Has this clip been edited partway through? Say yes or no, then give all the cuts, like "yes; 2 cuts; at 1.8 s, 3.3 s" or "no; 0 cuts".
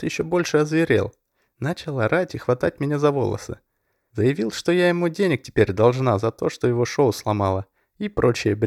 no; 0 cuts